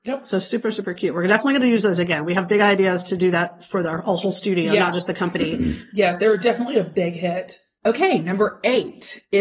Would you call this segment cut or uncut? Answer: uncut